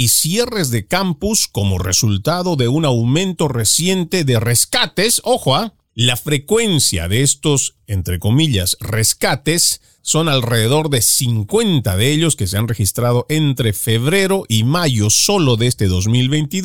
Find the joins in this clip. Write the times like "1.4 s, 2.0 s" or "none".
5.9 s, 10.0 s